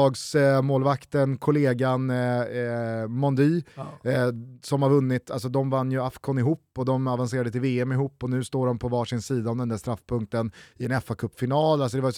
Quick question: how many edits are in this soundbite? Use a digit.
0